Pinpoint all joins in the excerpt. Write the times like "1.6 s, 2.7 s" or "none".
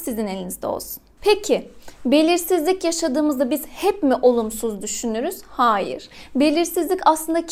none